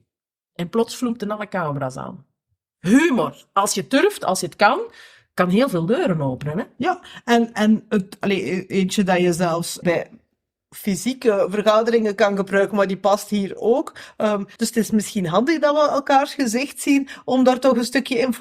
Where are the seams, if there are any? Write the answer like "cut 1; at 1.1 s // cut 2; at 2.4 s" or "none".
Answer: cut 1; at 9.8 s // cut 2; at 14.6 s